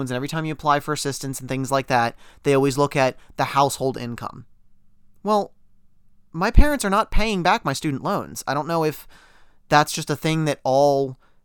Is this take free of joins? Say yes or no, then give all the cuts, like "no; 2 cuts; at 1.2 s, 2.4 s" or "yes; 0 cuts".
yes; 0 cuts